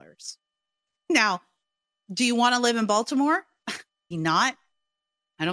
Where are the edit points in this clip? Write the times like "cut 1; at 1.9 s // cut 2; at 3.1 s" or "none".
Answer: cut 1; at 4.1 s